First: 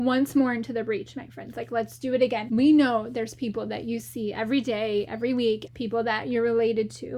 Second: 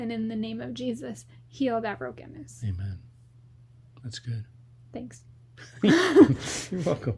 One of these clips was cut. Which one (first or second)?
first